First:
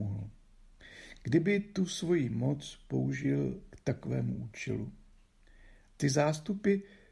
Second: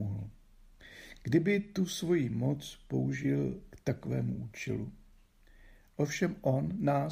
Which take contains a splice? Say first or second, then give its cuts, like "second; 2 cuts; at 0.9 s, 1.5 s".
first; 1 cut; at 5.9 s